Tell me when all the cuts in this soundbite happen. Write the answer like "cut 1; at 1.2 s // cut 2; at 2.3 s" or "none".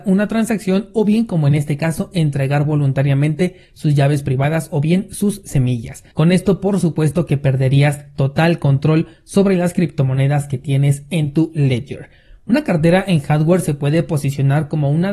cut 1; at 6.1 s